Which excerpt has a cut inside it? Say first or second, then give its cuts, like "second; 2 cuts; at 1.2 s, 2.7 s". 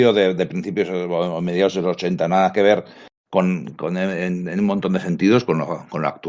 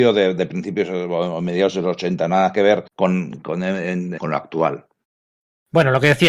second; 2 cuts; at 2.9 s, 4.2 s